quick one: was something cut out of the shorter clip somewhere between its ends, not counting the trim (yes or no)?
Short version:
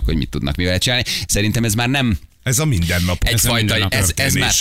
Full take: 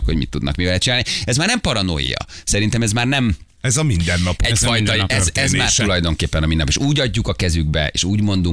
yes